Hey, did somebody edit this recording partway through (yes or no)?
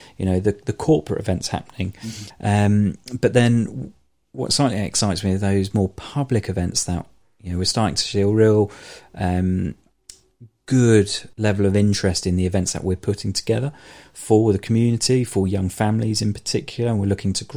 yes